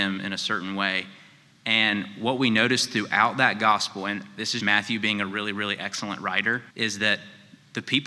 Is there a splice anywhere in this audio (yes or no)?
yes